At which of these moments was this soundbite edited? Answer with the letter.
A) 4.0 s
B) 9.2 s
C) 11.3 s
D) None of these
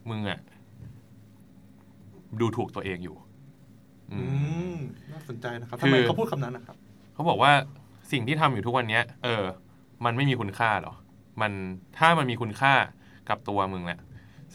B